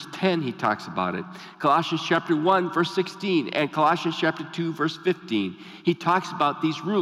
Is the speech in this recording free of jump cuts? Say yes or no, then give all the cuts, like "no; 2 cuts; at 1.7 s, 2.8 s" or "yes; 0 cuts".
yes; 0 cuts